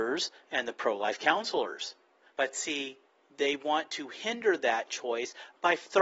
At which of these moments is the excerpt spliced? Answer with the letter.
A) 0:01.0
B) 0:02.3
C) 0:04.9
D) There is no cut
B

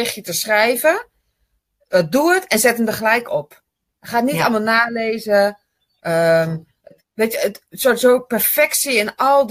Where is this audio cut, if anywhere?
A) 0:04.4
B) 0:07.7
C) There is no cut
C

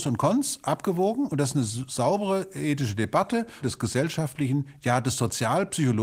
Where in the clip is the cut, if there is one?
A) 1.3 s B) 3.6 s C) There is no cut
B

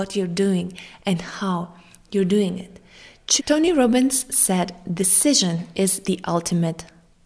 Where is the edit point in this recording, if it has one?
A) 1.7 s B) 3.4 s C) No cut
B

